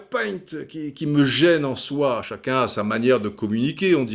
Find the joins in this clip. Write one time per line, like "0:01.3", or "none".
none